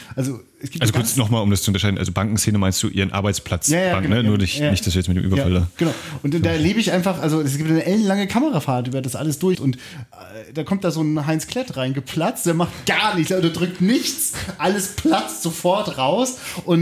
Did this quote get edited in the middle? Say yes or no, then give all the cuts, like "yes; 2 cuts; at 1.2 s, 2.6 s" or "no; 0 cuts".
yes; 1 cut; at 9.5 s